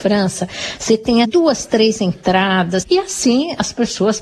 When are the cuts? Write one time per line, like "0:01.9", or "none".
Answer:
0:01.2
0:02.8